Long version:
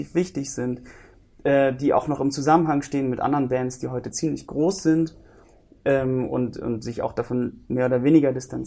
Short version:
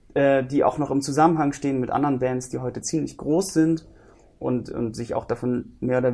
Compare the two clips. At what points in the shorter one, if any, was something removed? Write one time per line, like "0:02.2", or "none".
0:04.4